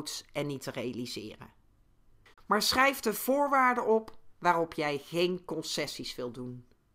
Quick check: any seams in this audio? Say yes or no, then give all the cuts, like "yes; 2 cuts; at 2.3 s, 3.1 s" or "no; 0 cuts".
yes; 1 cut; at 2.3 s